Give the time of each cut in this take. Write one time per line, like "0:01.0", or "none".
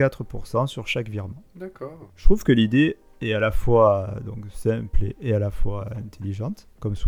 0:02.1